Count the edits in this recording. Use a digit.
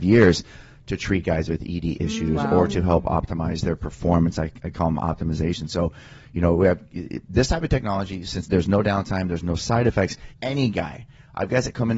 2